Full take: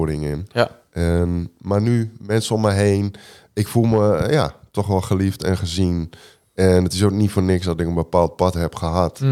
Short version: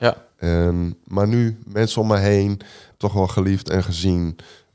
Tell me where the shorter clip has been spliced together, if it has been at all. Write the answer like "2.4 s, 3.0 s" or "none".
2.9 s